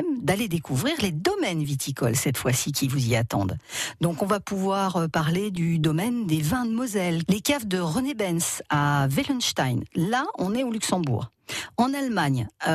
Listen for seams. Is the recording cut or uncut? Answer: cut